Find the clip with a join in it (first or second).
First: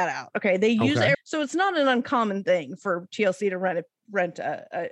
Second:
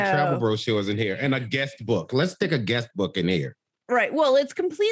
first